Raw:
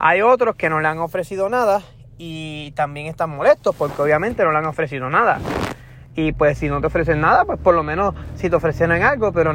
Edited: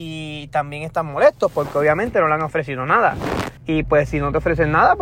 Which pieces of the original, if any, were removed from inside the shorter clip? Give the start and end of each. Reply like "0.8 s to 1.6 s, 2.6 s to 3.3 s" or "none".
5.8 s to 6.1 s